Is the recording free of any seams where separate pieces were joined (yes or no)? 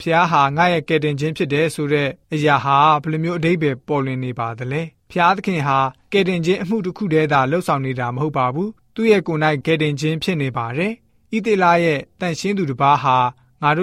no